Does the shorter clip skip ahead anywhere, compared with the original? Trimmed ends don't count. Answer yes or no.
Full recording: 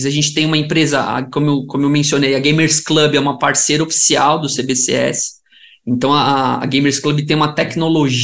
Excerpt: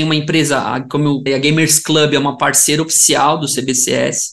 yes